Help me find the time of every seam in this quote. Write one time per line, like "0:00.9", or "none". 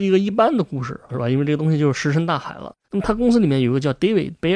0:01.1
0:02.8